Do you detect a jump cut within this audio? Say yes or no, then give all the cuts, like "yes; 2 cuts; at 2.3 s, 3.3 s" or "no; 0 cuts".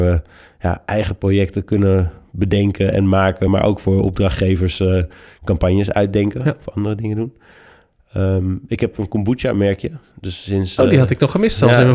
no; 0 cuts